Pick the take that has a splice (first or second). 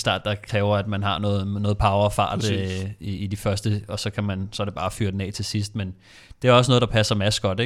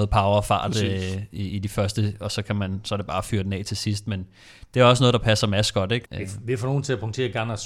second